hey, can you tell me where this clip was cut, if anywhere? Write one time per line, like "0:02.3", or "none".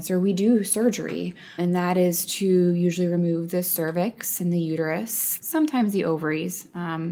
0:01.6
0:05.4